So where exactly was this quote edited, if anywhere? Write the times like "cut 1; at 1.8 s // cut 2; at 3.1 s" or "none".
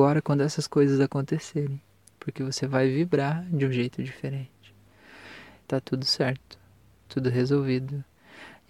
cut 1; at 2.1 s // cut 2; at 5.6 s